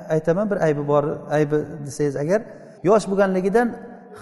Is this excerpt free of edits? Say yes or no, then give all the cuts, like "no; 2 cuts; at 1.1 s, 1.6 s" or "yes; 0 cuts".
no; 1 cut; at 2.8 s